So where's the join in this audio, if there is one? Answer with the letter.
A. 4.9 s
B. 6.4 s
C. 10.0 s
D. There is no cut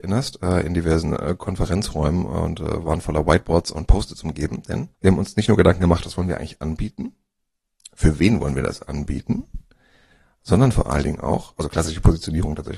A